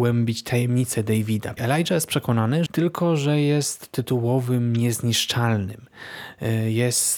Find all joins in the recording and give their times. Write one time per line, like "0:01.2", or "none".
0:01.6
0:02.7